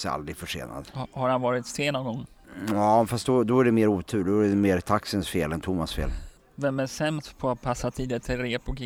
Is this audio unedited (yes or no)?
yes